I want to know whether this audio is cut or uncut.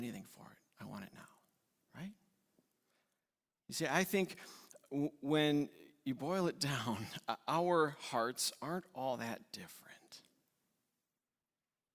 uncut